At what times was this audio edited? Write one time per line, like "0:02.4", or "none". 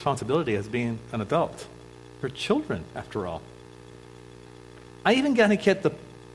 none